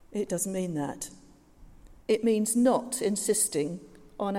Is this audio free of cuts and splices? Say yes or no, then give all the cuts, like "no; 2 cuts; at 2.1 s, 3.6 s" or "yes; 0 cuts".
no; 1 cut; at 2.0 s